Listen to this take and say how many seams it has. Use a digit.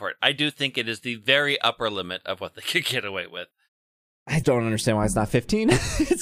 1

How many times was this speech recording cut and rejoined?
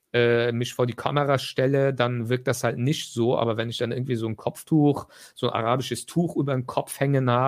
0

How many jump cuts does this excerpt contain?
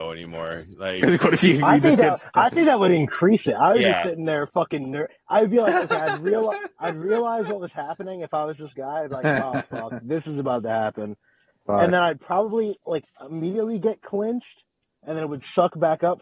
0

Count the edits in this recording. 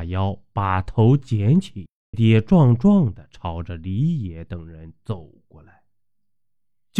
1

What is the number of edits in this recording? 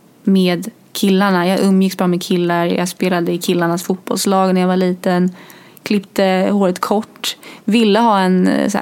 0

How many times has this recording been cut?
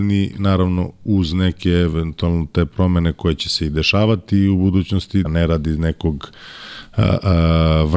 1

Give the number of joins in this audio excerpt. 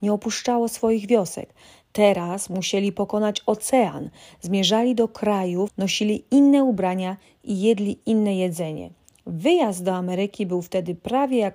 1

